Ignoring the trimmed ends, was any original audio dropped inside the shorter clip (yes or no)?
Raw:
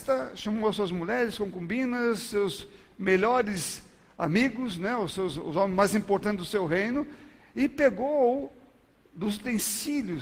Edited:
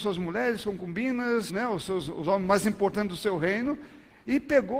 yes